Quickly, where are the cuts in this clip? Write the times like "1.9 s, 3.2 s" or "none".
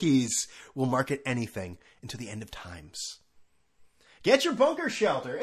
none